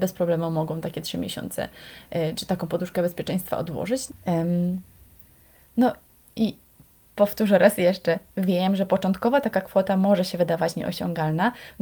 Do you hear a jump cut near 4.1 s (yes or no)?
yes